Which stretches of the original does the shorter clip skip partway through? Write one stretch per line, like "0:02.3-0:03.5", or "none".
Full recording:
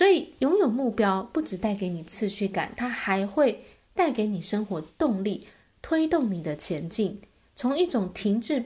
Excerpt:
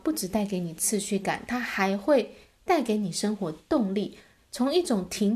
0:05.7-0:07.4